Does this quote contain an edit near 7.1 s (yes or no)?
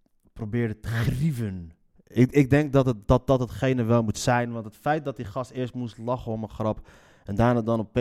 no